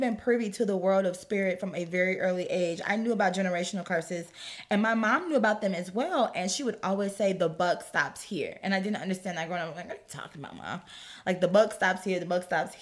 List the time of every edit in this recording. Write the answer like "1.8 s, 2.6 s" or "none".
none